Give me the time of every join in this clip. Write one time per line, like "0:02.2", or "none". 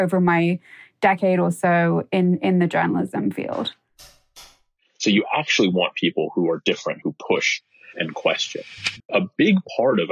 0:07.0
0:09.0